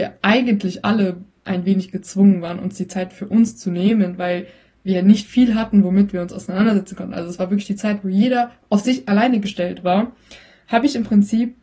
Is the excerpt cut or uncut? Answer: cut